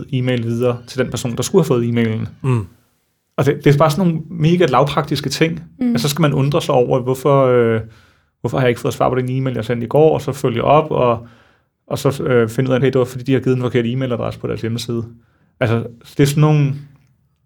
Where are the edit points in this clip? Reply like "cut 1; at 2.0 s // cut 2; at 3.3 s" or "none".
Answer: cut 1; at 12.8 s